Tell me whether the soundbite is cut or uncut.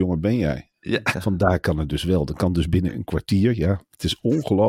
cut